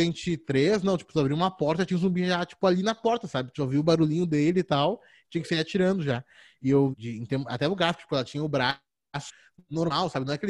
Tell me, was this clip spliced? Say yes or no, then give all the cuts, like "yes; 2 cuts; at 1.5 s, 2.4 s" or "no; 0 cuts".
yes; 1 cut; at 6.9 s